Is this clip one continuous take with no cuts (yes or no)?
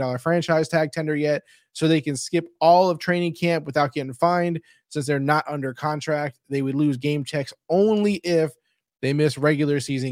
yes